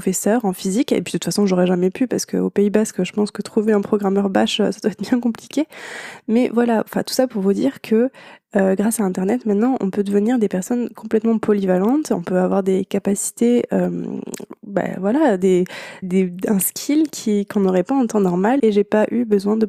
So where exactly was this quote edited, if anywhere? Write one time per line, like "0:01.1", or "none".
0:16.0
0:18.6